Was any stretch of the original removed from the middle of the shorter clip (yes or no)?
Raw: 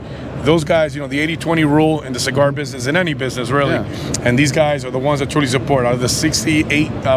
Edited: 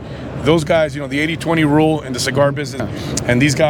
yes